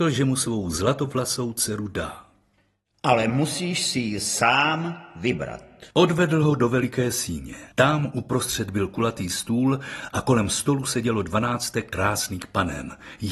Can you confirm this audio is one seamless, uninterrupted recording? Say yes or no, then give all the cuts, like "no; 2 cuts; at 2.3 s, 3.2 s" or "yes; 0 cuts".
no; 2 cuts; at 5.9 s, 7.7 s